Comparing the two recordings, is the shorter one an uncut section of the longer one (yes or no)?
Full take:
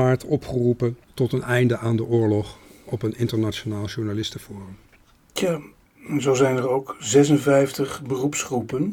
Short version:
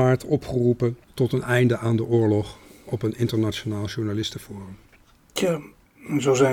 yes